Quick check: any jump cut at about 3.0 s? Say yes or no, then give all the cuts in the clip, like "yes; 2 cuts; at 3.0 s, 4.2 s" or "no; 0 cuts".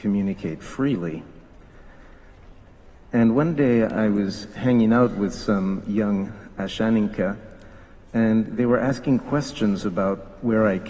no; 0 cuts